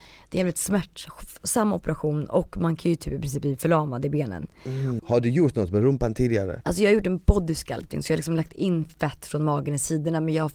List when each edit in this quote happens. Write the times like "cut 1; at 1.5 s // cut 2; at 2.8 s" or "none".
cut 1; at 5.0 s